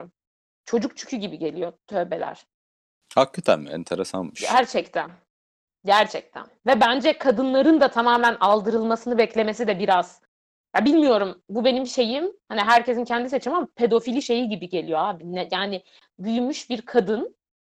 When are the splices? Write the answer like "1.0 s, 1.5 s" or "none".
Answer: none